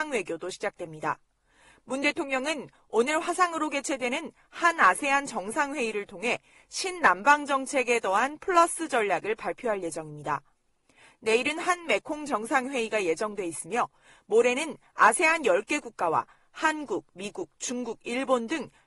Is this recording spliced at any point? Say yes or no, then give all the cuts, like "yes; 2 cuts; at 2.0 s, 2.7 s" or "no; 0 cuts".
no; 0 cuts